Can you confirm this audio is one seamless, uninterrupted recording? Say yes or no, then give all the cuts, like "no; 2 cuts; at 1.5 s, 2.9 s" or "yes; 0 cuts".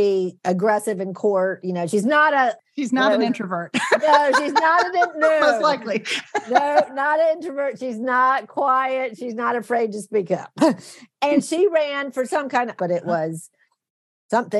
no; 1 cut; at 12.8 s